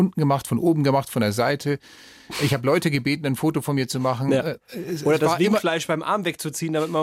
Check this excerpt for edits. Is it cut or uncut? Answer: uncut